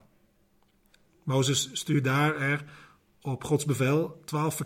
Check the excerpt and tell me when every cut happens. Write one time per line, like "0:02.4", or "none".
none